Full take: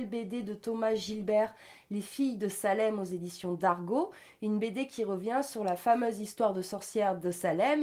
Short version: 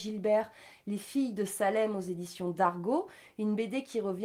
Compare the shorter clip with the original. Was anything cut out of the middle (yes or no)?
no